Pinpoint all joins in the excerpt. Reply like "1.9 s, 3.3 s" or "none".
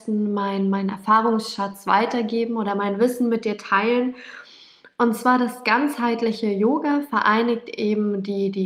none